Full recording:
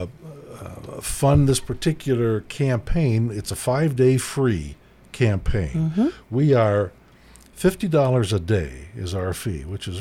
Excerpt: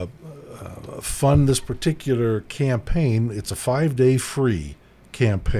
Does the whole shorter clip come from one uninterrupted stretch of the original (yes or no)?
yes